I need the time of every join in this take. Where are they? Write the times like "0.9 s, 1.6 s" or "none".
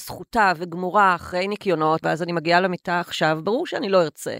2.0 s